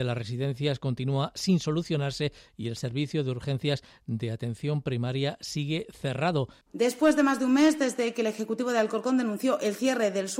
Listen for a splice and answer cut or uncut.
cut